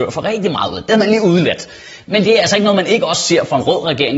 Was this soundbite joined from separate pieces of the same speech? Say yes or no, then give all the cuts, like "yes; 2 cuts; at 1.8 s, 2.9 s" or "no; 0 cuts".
yes; 1 cut; at 2.2 s